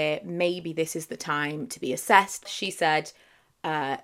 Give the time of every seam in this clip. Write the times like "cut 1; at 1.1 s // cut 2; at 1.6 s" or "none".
cut 1; at 2.5 s